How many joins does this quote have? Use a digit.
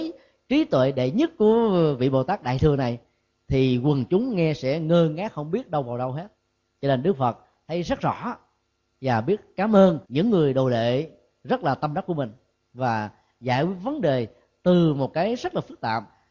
1